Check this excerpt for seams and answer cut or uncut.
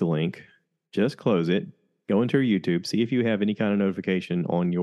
uncut